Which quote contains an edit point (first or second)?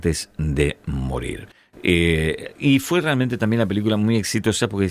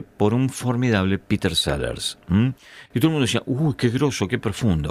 second